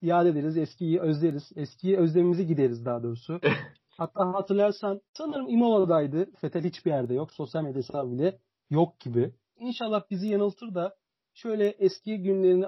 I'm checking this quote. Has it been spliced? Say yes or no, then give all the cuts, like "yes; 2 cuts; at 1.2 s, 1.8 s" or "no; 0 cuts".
yes; 3 cuts; at 5.1 s, 6.3 s, 9.6 s